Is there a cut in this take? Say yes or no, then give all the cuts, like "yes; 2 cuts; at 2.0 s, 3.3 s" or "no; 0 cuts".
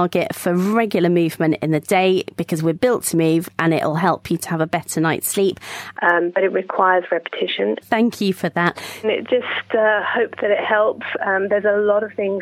yes; 3 cuts; at 5.9 s, 7.8 s, 9.0 s